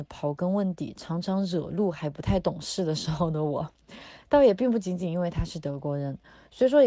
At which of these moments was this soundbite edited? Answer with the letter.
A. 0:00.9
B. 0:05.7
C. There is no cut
C